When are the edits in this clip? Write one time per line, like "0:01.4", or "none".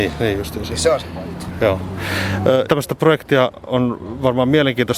0:02.7